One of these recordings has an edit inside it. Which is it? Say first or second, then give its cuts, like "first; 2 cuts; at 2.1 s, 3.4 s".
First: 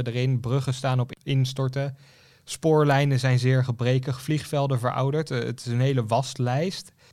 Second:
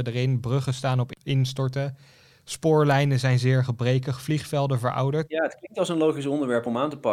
second; 1 cut; at 5.3 s